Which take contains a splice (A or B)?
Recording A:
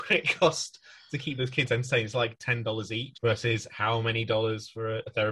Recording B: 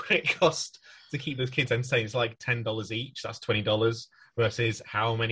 A